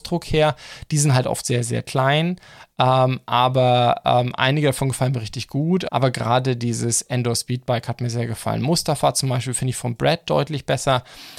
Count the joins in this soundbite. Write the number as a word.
one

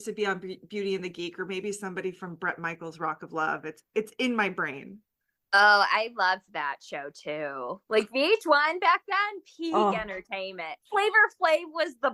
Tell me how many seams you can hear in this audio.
zero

